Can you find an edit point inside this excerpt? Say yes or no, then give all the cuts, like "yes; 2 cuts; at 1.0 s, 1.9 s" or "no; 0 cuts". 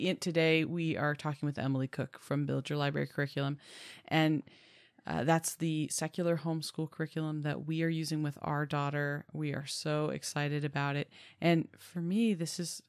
no; 0 cuts